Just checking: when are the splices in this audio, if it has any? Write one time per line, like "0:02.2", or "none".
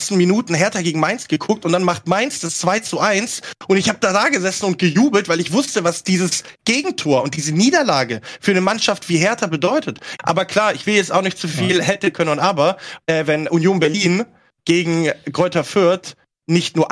0:10.2
0:13.0